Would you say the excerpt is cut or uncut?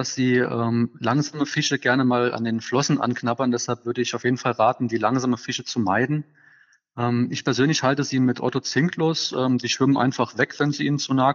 uncut